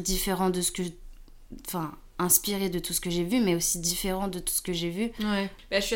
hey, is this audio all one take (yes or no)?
yes